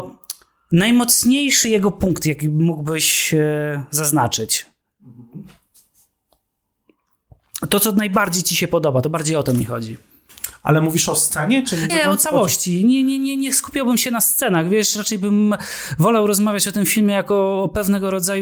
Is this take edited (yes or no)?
yes